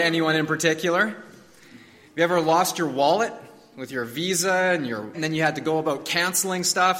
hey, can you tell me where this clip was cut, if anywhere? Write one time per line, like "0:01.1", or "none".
0:05.1